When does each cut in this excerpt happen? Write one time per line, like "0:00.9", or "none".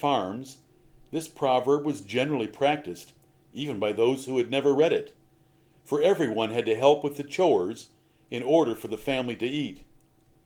none